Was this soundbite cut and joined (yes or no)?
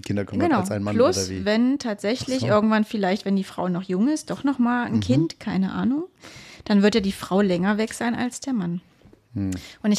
no